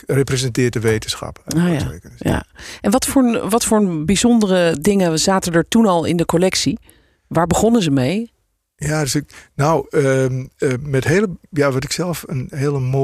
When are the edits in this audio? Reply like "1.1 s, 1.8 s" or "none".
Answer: none